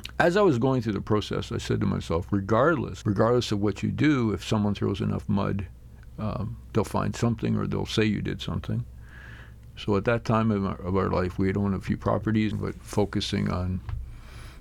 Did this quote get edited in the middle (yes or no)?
yes